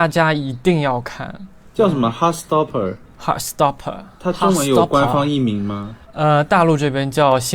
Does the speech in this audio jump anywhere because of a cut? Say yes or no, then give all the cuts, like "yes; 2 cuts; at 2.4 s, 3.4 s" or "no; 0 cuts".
yes; 1 cut; at 6.0 s